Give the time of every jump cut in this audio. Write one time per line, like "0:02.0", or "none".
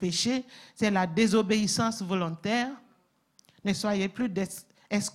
none